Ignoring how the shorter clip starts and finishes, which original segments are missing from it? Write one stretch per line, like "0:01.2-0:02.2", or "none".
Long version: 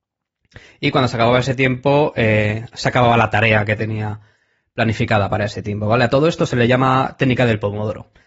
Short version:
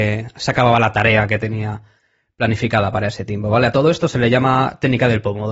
none